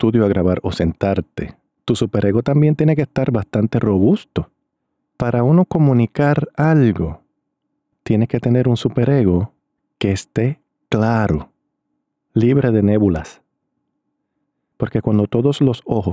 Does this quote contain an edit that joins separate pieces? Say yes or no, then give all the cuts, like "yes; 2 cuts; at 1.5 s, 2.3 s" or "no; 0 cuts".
no; 0 cuts